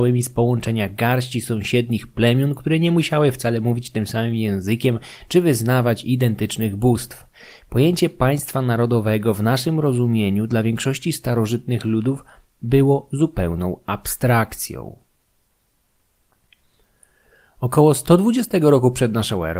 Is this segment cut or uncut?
uncut